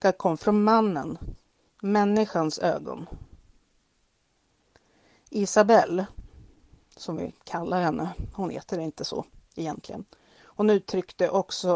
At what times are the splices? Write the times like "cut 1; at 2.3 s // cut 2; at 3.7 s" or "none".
none